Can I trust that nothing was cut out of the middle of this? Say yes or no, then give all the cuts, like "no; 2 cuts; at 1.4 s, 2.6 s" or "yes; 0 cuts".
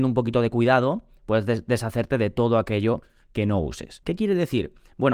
no; 1 cut; at 4.0 s